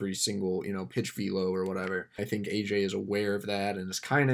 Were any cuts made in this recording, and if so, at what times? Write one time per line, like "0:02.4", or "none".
0:02.2